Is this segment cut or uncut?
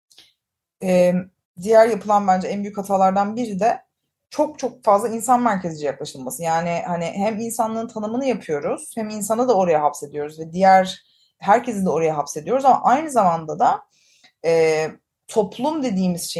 cut